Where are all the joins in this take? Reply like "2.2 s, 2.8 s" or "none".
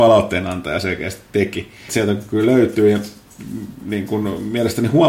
1.9 s